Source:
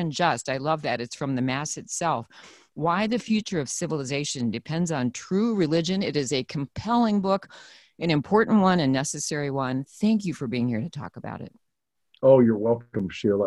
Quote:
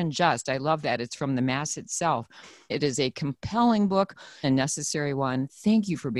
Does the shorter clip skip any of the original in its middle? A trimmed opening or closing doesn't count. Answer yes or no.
yes